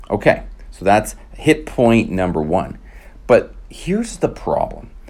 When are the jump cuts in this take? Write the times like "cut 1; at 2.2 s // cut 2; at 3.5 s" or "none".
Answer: none